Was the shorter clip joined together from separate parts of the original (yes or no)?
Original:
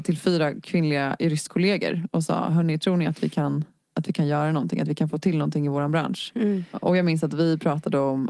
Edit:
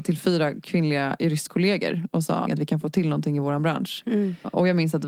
yes